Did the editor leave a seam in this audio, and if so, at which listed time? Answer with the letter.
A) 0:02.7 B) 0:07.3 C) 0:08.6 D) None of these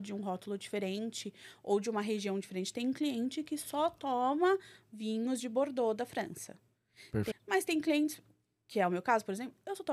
B